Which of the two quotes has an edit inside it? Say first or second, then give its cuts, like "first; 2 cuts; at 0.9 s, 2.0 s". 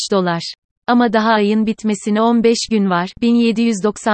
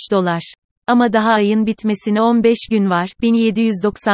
second; 1 cut; at 3.1 s